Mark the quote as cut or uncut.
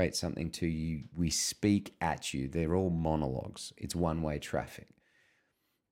uncut